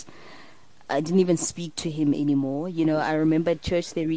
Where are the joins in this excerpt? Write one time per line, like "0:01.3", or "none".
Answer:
none